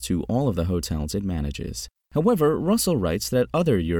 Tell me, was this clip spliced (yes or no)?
yes